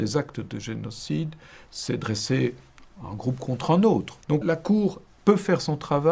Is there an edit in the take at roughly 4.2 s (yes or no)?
yes